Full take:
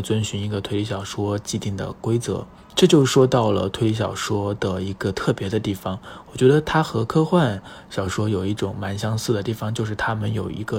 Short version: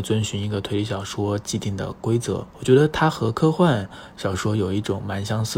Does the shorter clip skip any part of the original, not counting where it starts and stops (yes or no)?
yes